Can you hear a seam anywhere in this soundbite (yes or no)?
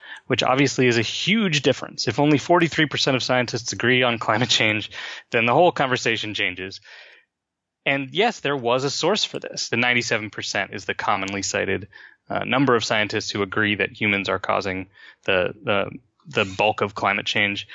yes